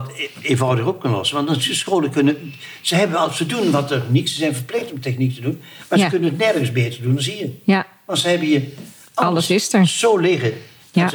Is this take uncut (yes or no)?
yes